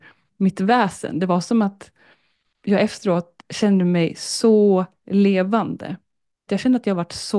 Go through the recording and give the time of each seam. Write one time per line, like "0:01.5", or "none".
0:06.5